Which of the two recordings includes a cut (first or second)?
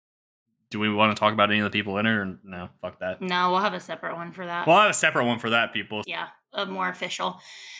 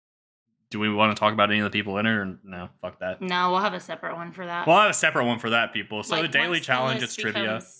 first